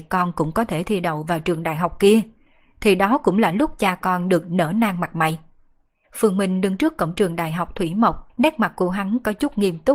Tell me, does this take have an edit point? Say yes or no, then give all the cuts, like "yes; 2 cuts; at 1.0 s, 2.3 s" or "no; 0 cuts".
yes; 2 cuts; at 6.0 s, 8.3 s